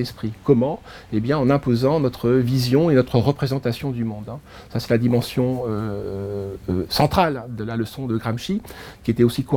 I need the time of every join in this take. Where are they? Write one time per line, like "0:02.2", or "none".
none